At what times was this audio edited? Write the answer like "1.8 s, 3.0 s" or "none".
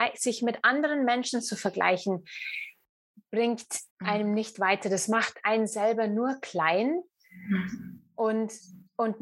3.9 s